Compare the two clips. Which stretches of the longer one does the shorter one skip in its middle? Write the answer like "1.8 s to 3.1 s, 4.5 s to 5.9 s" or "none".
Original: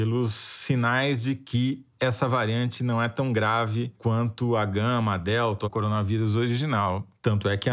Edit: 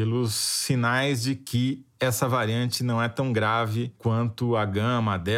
none